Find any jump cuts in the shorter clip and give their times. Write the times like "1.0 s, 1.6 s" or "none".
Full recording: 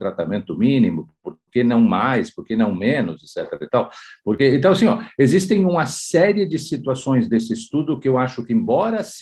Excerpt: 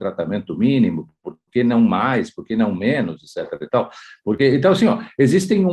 none